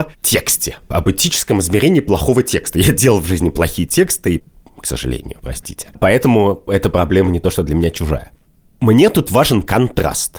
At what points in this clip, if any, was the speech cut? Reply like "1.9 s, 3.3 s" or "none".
none